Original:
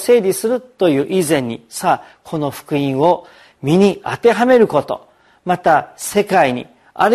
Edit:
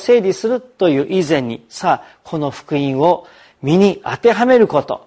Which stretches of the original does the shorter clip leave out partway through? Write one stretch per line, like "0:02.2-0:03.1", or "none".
none